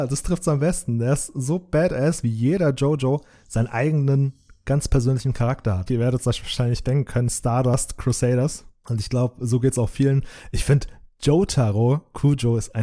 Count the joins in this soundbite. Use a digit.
2